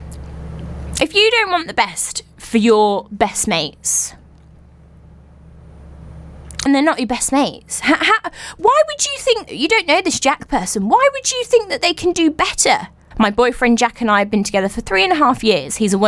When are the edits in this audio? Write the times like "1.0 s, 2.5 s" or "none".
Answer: 6.7 s, 9.5 s, 13.1 s